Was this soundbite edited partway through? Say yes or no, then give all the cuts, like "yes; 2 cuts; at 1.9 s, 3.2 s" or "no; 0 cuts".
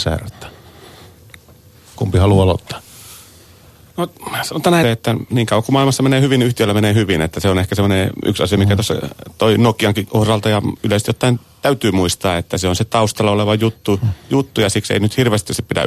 yes; 1 cut; at 4.8 s